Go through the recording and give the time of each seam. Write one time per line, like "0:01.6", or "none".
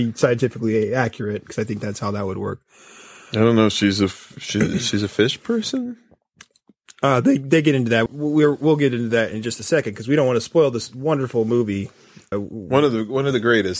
0:08.1
0:12.3